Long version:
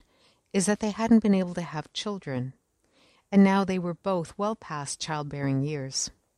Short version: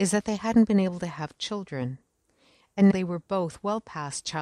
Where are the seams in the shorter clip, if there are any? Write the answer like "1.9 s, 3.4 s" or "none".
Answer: 2.9 s